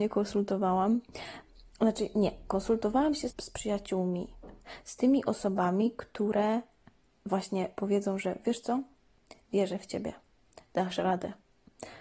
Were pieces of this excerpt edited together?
yes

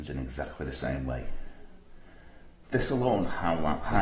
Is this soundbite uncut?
no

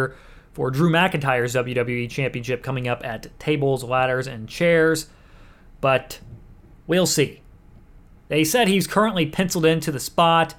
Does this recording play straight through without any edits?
yes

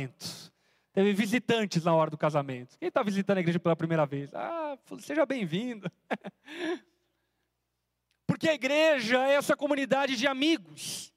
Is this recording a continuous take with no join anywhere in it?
yes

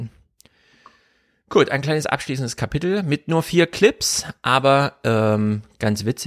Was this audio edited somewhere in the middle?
no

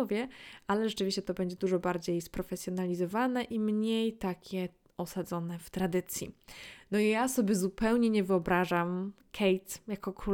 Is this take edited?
no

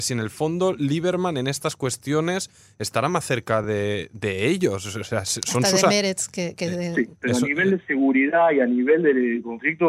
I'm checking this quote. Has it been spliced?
no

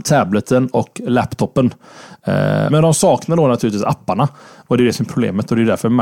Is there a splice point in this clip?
yes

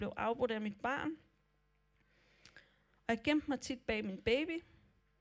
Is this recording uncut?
no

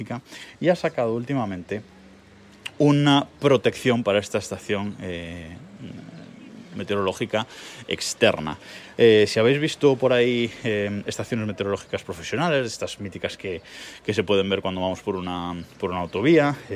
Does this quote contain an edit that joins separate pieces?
no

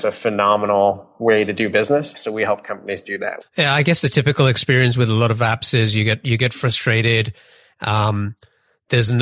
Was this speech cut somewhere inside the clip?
yes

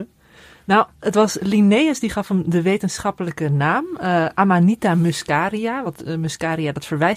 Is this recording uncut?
yes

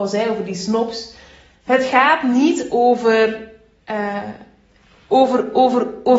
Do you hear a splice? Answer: no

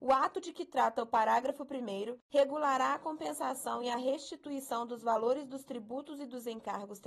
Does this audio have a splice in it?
no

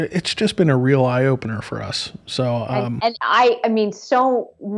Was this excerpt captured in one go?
no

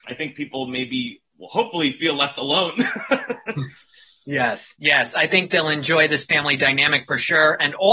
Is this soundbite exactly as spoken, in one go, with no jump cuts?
yes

